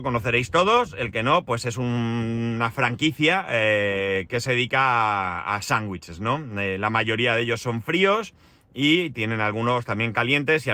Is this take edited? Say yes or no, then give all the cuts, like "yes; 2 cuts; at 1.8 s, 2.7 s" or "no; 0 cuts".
no; 0 cuts